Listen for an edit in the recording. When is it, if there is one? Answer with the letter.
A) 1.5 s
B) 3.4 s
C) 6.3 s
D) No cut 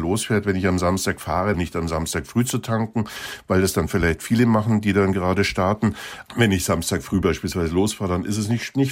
A